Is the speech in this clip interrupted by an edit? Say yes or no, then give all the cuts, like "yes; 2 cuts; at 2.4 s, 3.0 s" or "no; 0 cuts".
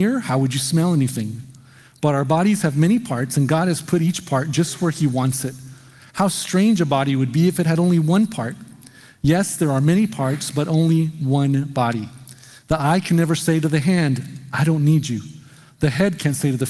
no; 0 cuts